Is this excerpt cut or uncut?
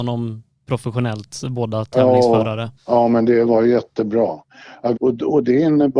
cut